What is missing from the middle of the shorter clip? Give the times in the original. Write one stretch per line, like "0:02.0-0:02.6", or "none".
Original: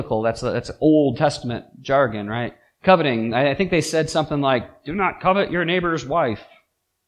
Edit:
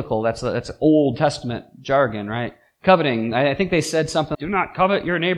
0:04.3-0:04.8